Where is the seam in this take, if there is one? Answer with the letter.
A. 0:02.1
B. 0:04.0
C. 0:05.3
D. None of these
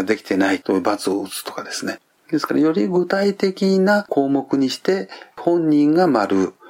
A